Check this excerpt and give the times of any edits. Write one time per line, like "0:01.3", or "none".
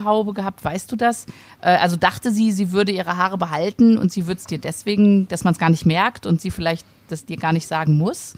none